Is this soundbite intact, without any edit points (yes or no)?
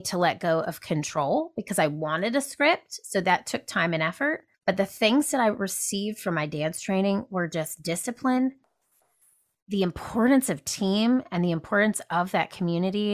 no